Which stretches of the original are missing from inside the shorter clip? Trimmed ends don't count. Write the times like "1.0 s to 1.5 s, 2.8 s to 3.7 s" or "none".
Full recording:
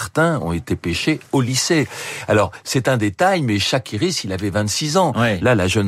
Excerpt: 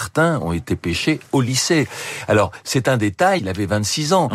3.4 s to 4.2 s

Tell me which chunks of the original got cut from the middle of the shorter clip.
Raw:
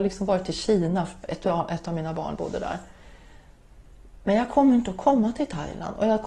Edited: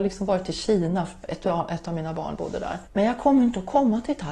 2.9 s to 4.2 s

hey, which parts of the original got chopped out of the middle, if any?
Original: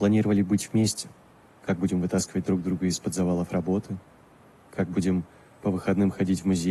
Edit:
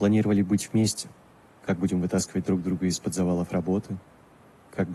none

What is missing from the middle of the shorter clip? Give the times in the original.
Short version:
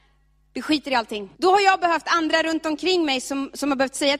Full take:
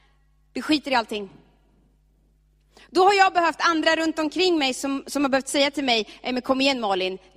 1.3 s to 2.9 s

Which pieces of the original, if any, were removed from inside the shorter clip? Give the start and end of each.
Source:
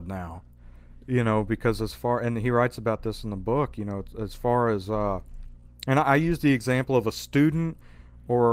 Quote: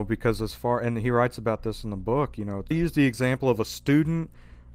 4.1 s to 6.2 s

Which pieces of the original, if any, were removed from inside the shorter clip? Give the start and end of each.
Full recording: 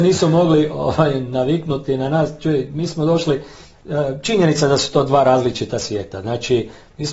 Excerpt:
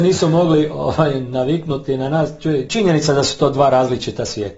2.7 s to 4.2 s

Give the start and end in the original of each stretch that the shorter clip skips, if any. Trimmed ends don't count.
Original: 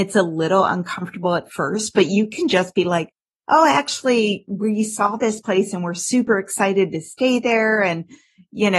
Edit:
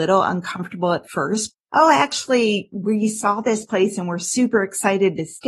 1.9 s to 3.3 s

